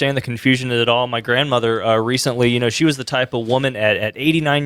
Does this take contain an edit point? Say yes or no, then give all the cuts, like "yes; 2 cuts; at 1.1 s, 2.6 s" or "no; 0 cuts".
no; 0 cuts